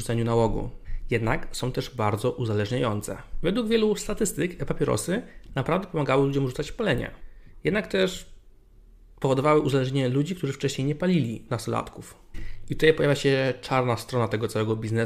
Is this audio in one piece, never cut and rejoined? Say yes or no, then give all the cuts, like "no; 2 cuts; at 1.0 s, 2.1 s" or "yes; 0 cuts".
no; 1 cut; at 11.5 s